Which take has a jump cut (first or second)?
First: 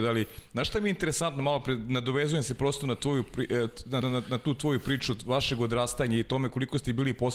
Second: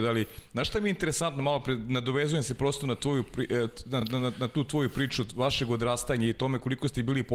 first